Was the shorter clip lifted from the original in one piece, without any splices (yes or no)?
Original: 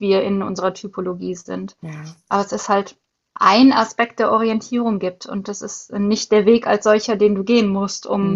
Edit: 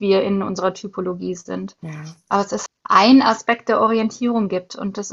no